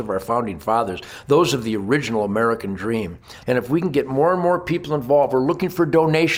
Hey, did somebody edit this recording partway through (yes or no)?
yes